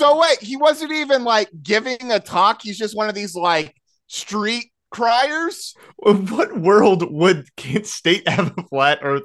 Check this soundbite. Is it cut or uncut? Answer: uncut